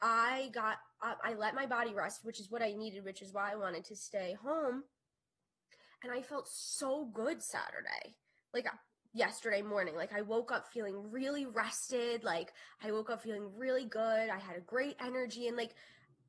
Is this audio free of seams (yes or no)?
yes